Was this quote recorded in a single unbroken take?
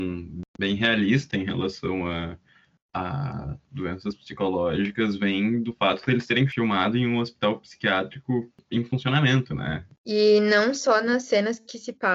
yes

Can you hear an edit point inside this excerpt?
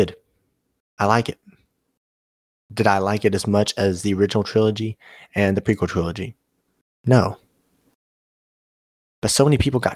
no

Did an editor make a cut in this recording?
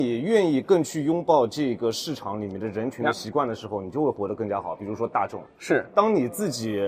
no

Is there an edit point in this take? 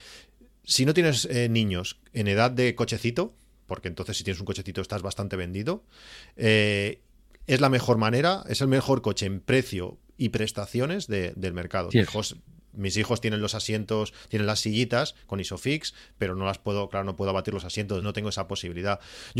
yes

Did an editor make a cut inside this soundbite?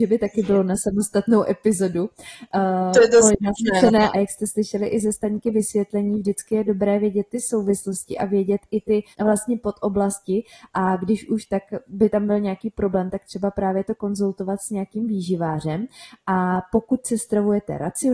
yes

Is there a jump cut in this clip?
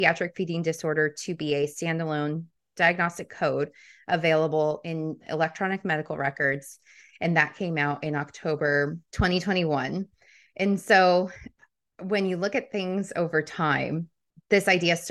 no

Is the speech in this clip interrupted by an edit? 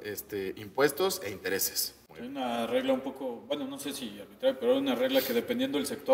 no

